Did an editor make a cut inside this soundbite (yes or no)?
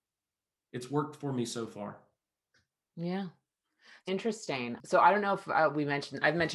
yes